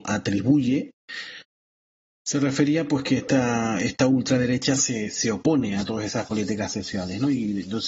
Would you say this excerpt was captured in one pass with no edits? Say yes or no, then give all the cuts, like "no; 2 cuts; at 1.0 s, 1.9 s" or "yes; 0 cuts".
yes; 0 cuts